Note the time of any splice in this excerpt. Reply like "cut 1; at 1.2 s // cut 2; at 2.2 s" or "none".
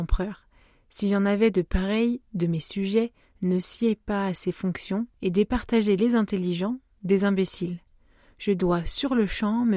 cut 1; at 2.2 s // cut 2; at 5.1 s